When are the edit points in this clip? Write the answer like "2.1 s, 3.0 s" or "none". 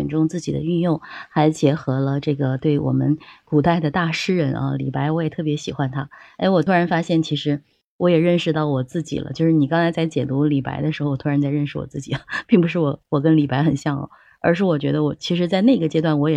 none